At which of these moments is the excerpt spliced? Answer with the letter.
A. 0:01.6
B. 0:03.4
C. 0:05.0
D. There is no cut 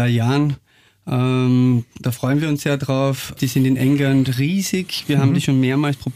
B